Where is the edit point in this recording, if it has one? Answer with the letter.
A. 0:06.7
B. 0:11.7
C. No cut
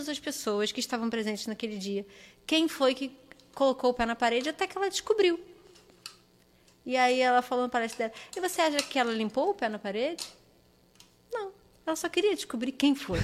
C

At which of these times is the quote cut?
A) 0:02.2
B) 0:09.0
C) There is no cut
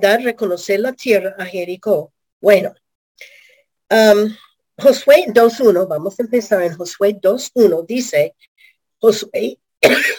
A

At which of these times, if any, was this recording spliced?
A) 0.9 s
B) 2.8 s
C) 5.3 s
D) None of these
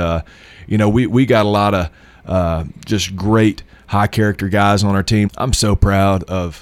C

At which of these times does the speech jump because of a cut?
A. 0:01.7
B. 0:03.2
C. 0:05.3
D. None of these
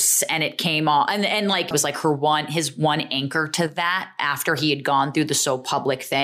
A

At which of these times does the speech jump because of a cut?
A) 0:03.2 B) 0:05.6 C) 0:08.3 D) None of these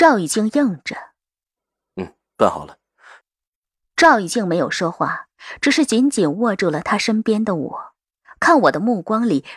A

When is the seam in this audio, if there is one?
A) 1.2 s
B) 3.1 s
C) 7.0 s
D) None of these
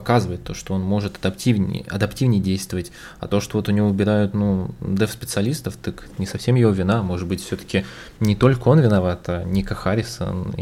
D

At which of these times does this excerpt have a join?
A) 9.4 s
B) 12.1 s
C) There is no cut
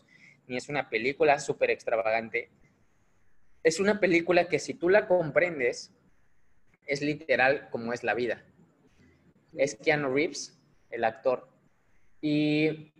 A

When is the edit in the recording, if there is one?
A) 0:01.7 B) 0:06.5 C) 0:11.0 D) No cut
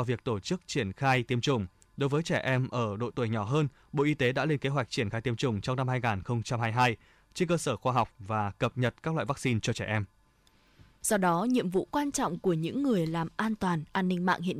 C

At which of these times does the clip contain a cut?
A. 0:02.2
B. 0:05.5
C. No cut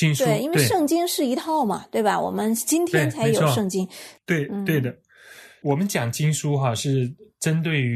C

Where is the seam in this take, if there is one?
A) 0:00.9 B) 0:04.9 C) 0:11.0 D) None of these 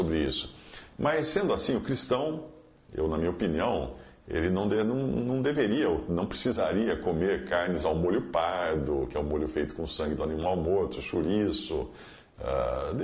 D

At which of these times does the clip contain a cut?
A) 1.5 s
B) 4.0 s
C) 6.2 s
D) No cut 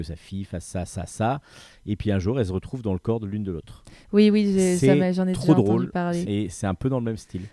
C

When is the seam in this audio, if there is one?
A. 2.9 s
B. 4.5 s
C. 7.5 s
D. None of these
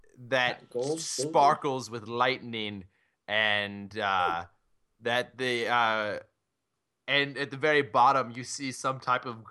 D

